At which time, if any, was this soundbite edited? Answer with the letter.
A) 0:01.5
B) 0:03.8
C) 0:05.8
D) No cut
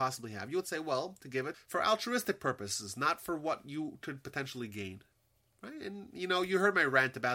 A